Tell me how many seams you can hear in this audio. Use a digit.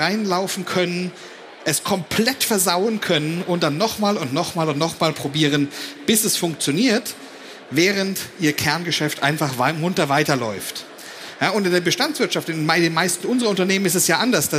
0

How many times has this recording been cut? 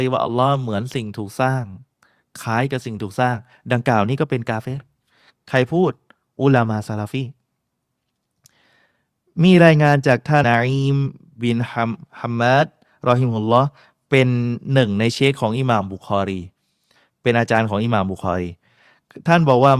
1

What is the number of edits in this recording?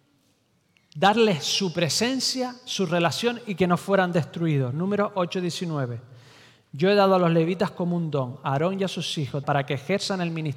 1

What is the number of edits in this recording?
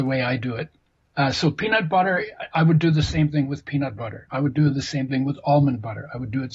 0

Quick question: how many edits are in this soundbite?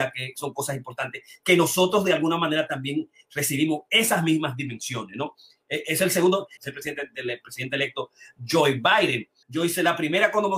2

